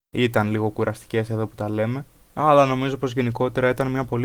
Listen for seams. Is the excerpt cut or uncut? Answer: uncut